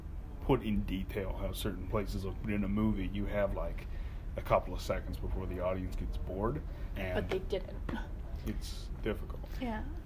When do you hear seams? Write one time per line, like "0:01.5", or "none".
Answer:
0:06.9
0:08.4